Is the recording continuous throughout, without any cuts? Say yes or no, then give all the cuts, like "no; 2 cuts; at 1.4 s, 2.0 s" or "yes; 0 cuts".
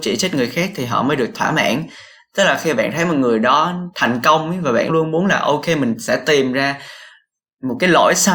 no; 1 cut; at 4.9 s